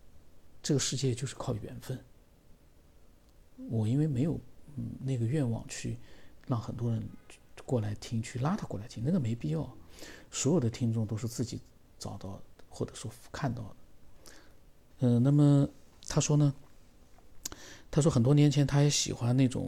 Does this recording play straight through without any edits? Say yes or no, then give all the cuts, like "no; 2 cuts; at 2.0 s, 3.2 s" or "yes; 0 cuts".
no; 1 cut; at 14.9 s